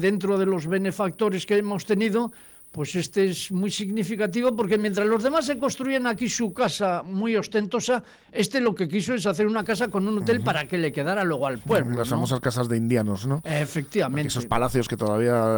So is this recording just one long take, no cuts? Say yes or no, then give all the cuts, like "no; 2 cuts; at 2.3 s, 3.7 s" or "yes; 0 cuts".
yes; 0 cuts